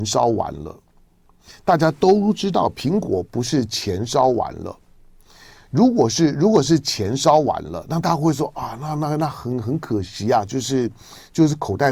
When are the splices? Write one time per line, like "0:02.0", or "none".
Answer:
none